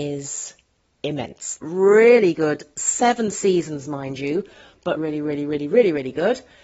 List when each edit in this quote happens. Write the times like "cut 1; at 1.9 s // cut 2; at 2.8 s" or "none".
cut 1; at 1.6 s // cut 2; at 5.0 s

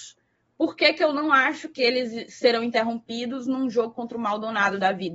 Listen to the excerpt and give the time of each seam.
none

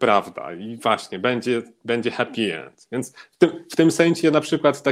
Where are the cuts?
none

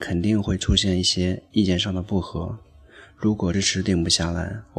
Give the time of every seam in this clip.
cut 1; at 3.5 s

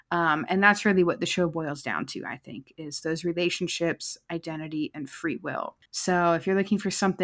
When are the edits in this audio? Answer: cut 1; at 5.9 s

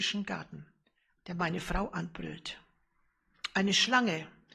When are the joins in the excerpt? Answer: cut 1; at 1.1 s

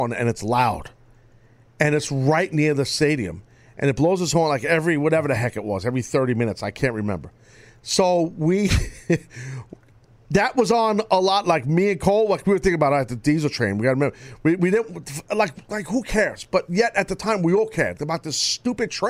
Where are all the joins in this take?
cut 1; at 18.0 s

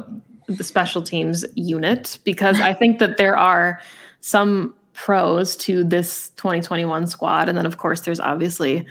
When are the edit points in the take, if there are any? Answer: none

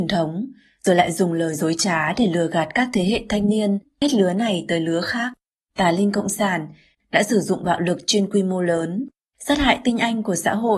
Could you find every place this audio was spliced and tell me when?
cut 1; at 5.7 s // cut 2; at 6.9 s

